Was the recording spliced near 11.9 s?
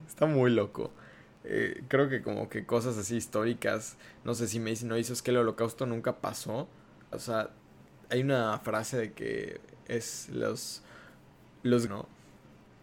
yes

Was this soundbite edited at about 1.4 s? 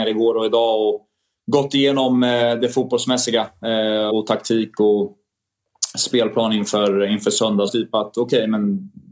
no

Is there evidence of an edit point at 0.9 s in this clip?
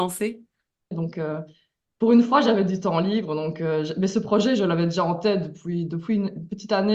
yes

